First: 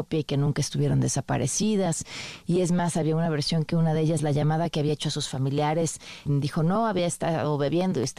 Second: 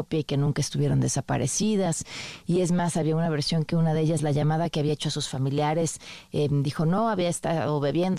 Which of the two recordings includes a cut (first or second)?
first